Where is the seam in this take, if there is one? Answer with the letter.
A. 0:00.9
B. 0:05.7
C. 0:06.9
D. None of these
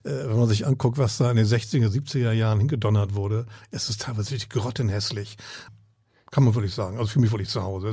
B